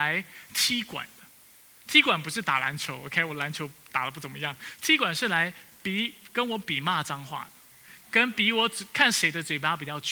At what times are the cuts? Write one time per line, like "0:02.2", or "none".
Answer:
none